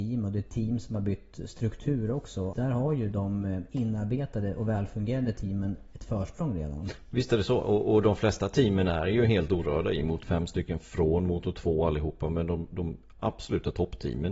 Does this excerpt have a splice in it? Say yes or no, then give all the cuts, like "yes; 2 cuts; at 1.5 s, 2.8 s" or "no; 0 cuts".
yes; 2 cuts; at 2.5 s, 10.2 s